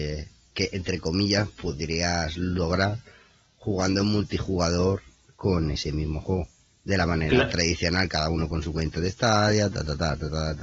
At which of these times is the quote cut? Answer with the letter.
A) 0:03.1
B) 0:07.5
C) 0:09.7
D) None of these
D